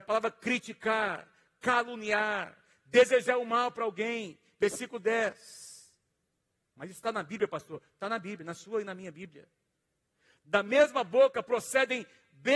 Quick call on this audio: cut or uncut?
uncut